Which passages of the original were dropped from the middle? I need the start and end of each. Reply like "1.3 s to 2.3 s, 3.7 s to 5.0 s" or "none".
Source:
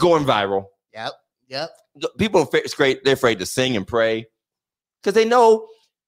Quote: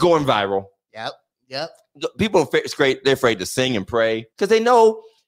4.3 s to 5.0 s

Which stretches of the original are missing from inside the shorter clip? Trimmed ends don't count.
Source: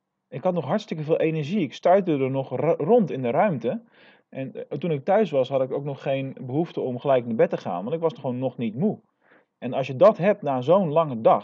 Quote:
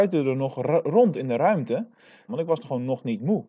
4.2 s to 7.8 s

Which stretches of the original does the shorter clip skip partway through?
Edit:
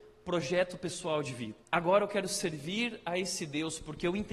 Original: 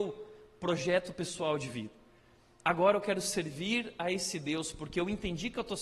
2.0 s to 2.5 s

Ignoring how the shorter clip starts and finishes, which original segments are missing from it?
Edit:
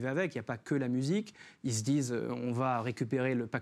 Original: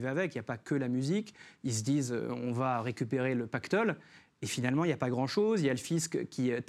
none

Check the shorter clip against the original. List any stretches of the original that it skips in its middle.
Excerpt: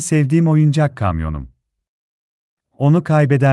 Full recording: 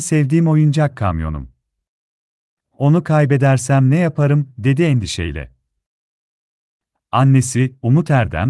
none

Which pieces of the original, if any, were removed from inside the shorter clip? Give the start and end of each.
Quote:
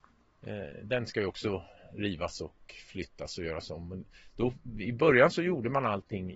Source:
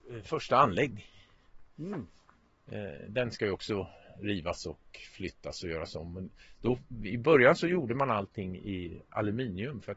none

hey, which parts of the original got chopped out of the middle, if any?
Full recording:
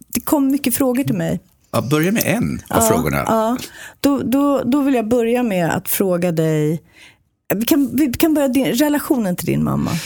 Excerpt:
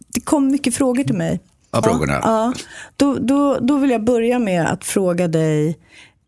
1.8 s to 2.9 s

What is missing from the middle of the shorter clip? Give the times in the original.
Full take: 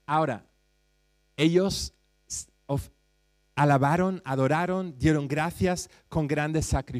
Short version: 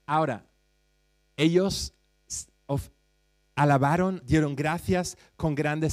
4.2 s to 4.9 s

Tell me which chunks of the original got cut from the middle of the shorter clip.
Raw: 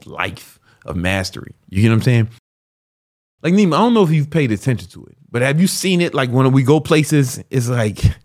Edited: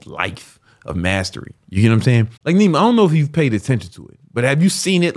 2.4 s to 3.3 s

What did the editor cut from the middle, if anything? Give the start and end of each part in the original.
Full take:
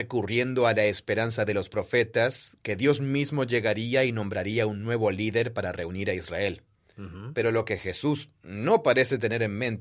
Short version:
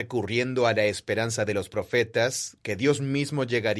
none

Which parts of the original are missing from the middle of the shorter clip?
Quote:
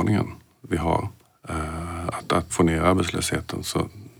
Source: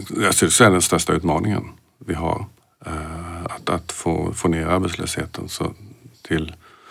3.9 s to 4.3 s

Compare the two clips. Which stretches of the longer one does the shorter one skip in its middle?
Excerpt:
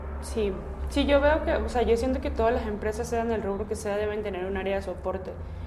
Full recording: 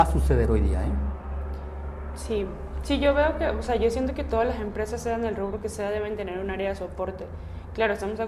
none

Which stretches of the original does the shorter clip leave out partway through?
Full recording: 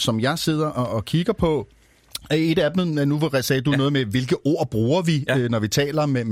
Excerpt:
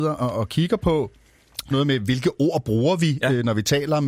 2.3 s to 3.8 s

